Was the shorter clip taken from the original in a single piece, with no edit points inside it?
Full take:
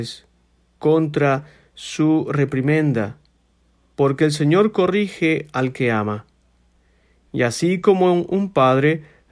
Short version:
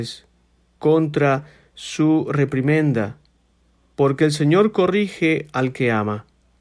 yes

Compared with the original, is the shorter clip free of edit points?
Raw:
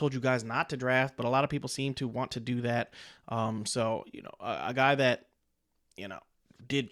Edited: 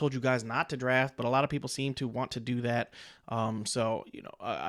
yes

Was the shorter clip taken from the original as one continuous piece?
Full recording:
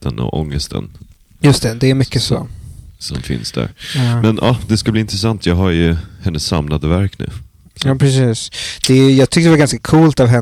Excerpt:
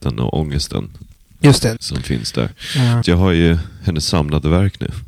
no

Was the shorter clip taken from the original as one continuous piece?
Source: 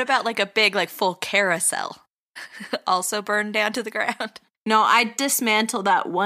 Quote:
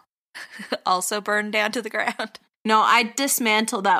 yes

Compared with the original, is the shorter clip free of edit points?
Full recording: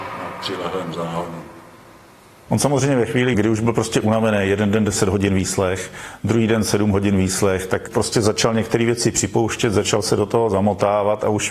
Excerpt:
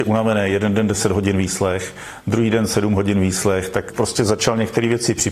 yes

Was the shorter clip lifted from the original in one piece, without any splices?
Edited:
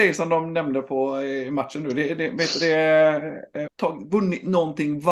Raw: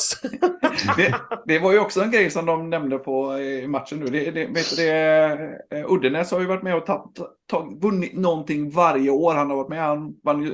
no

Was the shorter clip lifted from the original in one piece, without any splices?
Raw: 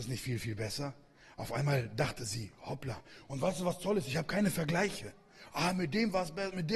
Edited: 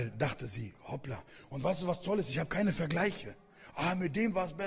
yes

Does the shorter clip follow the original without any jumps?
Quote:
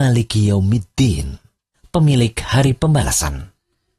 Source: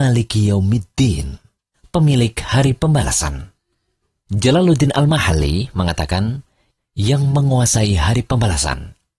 yes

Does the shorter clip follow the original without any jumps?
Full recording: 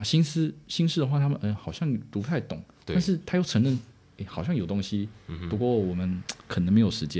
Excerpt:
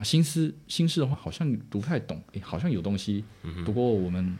no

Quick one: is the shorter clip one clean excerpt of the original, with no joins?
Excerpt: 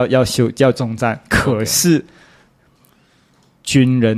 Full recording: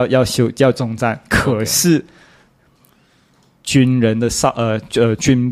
yes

